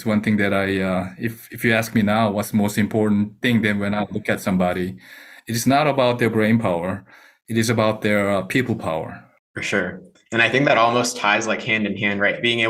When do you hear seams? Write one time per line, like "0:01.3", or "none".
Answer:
none